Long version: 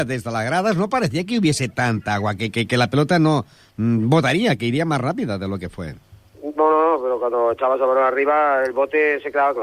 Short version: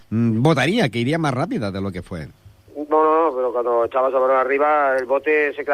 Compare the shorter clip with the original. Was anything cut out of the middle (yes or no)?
no